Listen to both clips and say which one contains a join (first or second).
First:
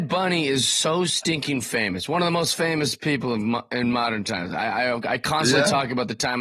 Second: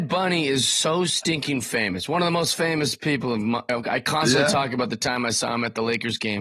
second